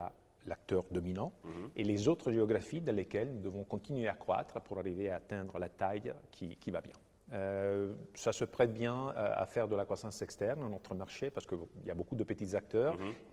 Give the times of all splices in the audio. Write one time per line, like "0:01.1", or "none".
0:07.2